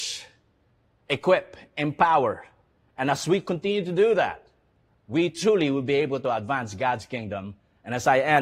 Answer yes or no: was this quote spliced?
no